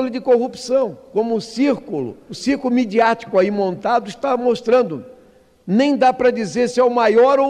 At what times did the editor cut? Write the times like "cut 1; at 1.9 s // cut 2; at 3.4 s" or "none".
cut 1; at 2.3 s